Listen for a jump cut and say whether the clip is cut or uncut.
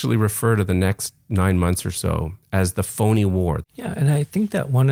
cut